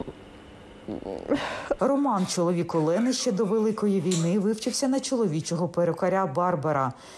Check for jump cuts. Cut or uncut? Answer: cut